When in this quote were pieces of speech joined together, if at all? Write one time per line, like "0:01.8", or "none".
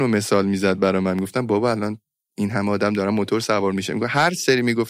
none